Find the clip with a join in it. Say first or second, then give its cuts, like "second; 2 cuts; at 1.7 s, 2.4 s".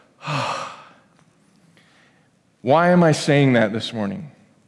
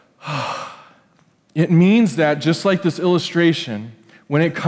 second; 1 cut; at 1.3 s